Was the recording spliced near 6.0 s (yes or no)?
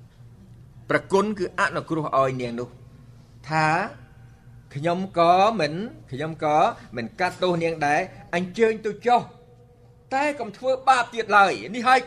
yes